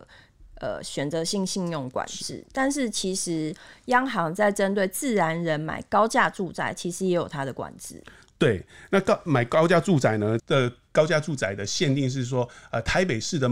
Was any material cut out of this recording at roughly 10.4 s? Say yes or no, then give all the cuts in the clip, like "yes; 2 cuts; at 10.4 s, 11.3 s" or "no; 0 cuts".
yes; 1 cut; at 10.4 s